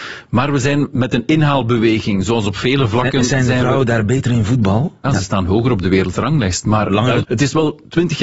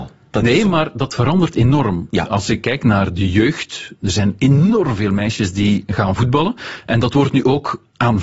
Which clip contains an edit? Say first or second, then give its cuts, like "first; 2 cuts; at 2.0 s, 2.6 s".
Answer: first; 2 cuts; at 5.0 s, 7.2 s